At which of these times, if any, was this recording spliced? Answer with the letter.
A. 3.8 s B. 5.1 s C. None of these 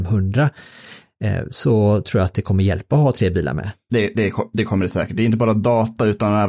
C